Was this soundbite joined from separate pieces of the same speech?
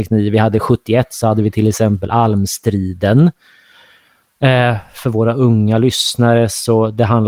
no; 0 cuts

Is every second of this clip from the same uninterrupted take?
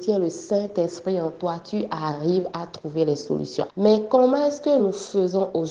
no; 2 cuts; at 3.7 s, 4.8 s

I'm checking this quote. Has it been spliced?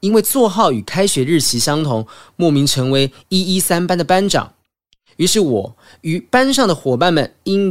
no; 0 cuts

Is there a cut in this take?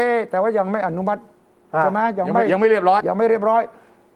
yes; 1 cut; at 3.0 s

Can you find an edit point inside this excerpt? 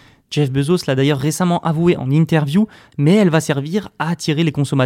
yes; 1 cut; at 2.9 s

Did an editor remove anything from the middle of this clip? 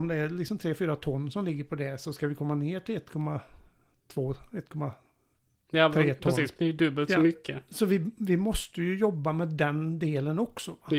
yes; 1 cut; at 6.6 s

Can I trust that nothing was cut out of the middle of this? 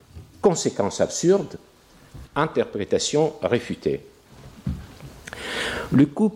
no; 1 cut; at 2.2 s

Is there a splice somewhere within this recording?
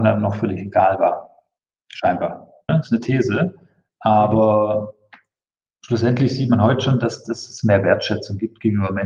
yes; 1 cut; at 2.7 s

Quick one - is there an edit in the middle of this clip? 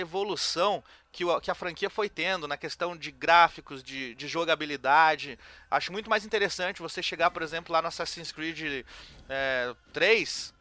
no; 0 cuts

